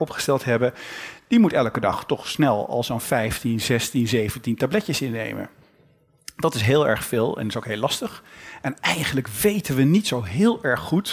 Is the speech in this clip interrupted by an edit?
no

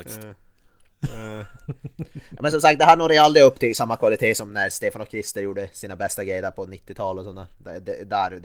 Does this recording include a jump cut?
no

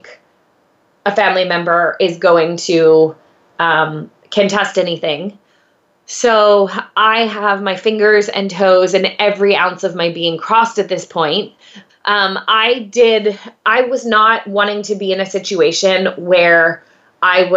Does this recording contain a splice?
yes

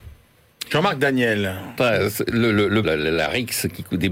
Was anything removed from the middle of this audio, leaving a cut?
yes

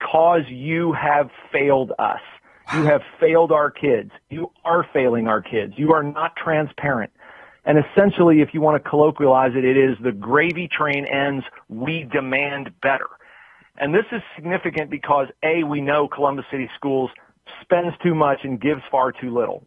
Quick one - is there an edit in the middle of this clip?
no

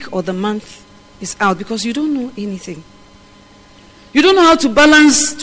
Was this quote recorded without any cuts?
yes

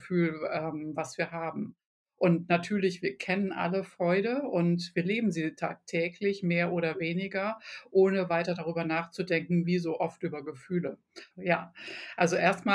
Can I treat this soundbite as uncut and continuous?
no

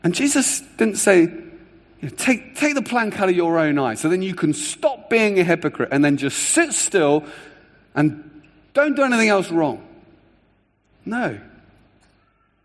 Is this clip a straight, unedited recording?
yes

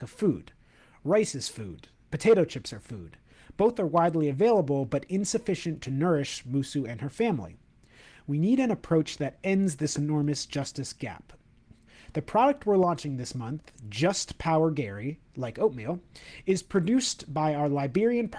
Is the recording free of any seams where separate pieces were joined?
yes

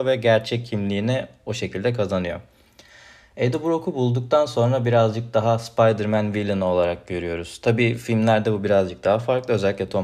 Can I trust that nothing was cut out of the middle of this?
yes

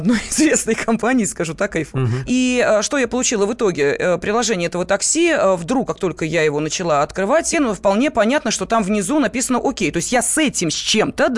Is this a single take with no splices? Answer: no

